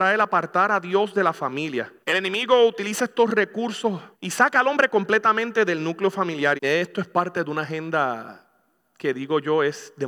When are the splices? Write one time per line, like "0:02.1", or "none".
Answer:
0:02.0
0:04.1
0:06.6